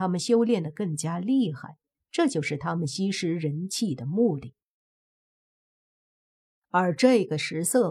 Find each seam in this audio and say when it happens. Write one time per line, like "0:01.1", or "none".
none